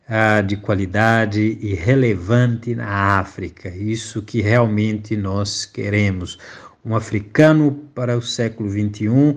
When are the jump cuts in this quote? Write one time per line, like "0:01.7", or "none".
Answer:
none